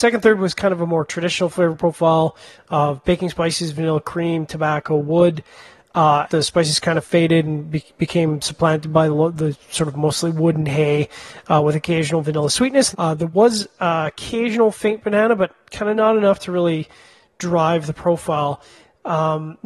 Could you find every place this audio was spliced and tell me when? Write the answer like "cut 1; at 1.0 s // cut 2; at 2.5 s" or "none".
cut 1; at 6.3 s // cut 2; at 12.9 s